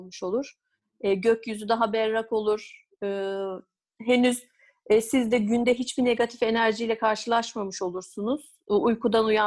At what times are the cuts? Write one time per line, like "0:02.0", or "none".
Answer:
none